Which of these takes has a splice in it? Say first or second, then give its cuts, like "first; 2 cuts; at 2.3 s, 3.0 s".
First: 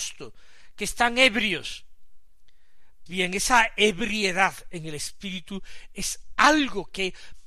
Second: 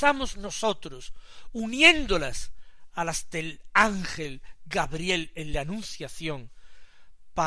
first; 1 cut; at 3.1 s